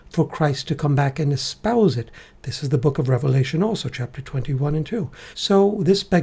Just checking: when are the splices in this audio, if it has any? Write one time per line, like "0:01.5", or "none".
0:05.3

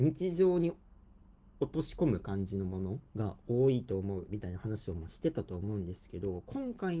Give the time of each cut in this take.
0:03.1

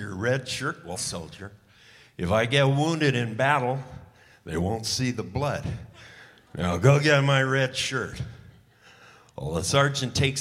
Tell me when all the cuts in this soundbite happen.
0:00.9

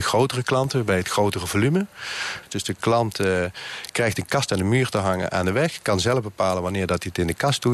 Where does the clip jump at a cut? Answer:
0:02.5

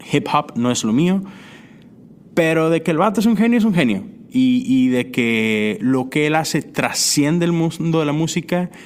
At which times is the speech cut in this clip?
none

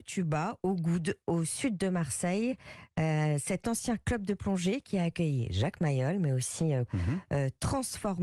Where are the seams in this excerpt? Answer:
0:06.9

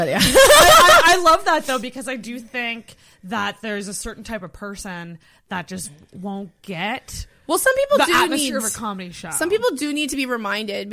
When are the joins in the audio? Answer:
none

